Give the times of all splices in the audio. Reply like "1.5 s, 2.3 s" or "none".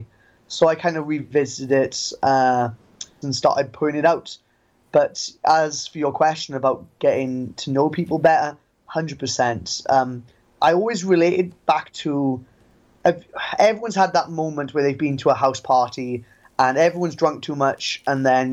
3.2 s

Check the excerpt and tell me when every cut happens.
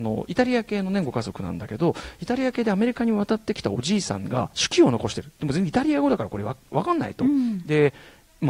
none

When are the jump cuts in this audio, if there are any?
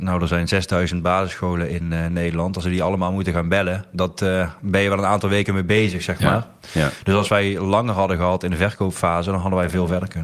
none

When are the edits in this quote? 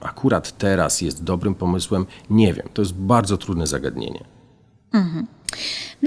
none

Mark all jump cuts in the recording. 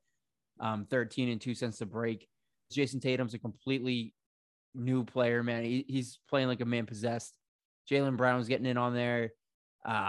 2.7 s

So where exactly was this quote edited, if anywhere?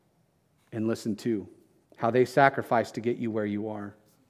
1.8 s

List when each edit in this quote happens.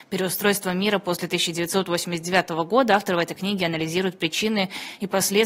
none

